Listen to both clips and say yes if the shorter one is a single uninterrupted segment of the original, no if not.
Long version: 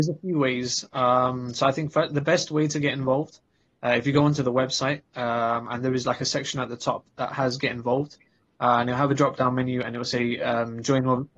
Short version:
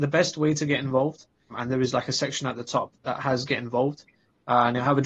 no